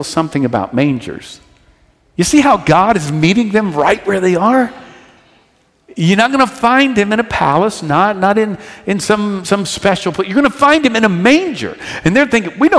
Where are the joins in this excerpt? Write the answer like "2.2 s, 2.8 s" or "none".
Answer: none